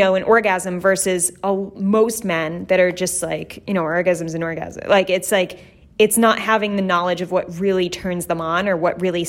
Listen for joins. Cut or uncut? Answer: uncut